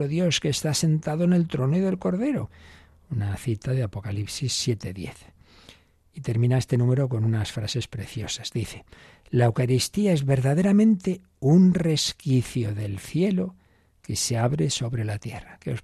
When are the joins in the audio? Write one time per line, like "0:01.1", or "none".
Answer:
none